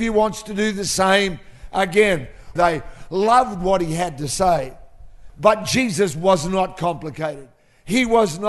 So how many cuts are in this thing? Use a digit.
2